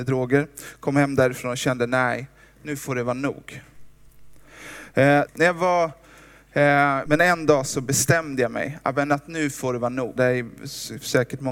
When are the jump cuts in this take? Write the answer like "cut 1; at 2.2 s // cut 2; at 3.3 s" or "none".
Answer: cut 1; at 5.3 s // cut 2; at 7.1 s // cut 3; at 10.2 s